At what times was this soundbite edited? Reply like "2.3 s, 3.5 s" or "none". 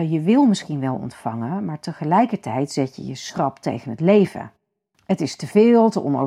none